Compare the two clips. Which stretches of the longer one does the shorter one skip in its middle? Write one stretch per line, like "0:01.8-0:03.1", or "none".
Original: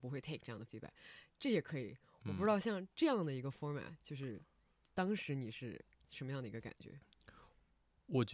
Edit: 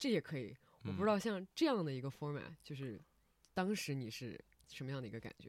none